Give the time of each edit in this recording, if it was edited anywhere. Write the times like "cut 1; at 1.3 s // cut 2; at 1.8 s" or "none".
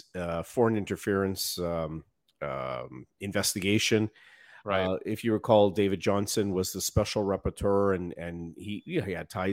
none